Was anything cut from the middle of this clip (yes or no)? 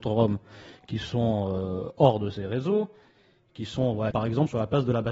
yes